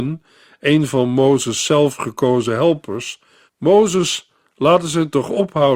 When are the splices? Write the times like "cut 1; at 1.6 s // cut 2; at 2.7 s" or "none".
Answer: cut 1; at 3.5 s